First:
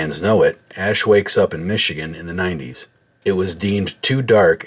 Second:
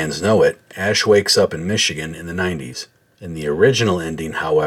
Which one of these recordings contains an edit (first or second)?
first